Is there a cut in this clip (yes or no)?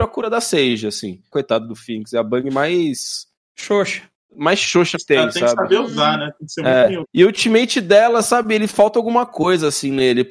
yes